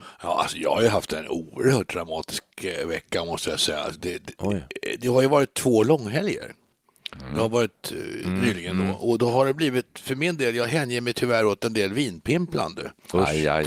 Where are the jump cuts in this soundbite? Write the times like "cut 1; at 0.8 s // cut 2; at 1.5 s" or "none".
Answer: none